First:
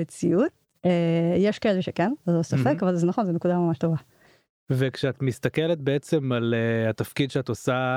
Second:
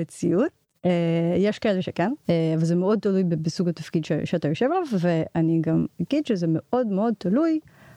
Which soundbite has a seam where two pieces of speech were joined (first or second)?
second